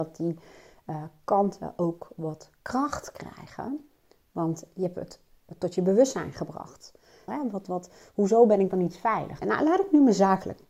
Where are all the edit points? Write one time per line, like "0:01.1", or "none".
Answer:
0:07.3
0:09.4

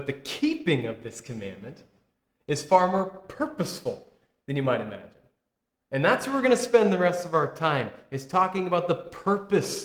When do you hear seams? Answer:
none

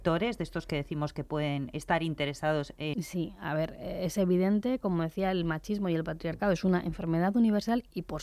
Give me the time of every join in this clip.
0:02.9

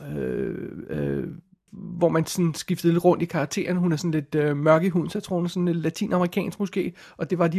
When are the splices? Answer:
0:01.7

